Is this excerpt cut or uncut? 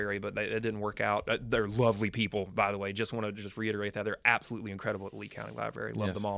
uncut